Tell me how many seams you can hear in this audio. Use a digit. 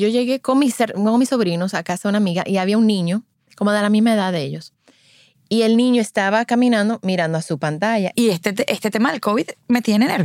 1